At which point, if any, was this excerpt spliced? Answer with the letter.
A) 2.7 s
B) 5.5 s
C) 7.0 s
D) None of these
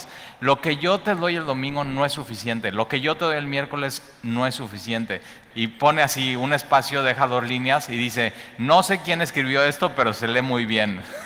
B